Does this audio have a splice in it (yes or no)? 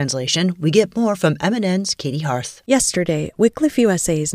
no